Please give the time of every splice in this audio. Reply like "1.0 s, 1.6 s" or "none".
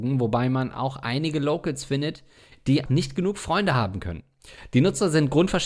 2.9 s